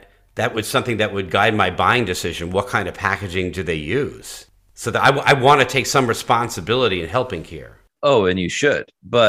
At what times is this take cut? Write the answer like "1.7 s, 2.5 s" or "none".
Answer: none